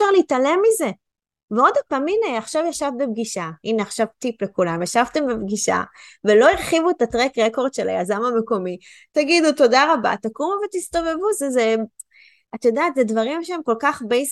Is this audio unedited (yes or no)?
yes